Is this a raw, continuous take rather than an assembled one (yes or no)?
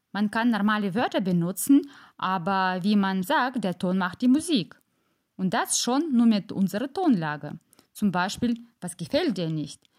no